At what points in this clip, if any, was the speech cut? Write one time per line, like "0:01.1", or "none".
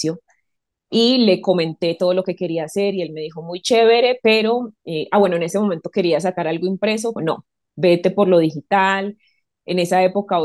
0:07.2